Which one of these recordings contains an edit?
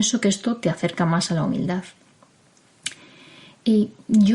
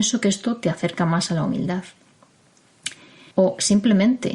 second; 1 cut; at 3.3 s

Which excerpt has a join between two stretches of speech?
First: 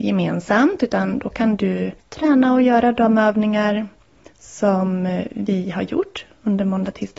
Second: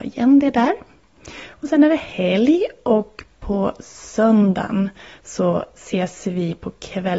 first; 1 cut; at 2.0 s

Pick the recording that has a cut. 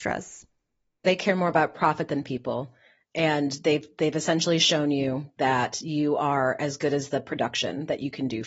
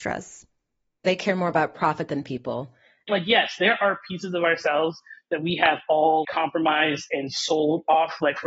second; 2 cuts; at 3.1 s, 6.2 s

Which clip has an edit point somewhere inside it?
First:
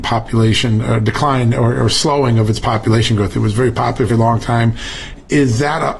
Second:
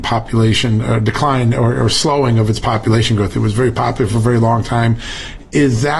first; 1 cut; at 4.1 s

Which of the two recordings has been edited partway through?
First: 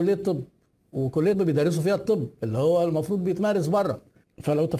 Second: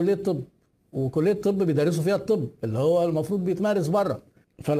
first; 1 cut; at 1.3 s

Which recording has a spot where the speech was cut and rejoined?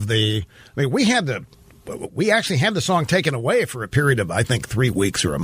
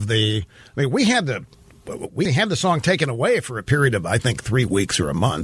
second; 1 cut; at 2.3 s

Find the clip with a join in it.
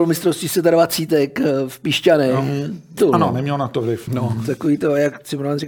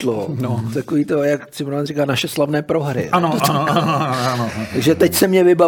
first; 2 cuts; at 3.0 s, 4.1 s

